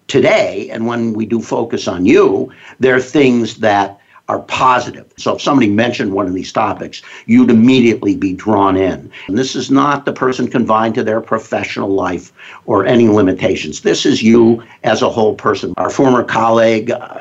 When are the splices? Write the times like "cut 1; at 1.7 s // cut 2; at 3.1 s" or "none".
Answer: cut 1; at 5.2 s // cut 2; at 9.3 s // cut 3; at 15.7 s